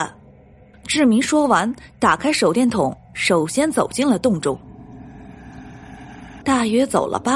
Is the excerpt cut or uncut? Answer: cut